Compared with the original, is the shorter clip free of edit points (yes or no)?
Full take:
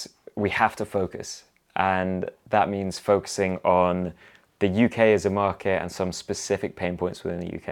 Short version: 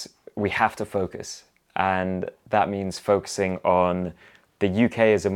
yes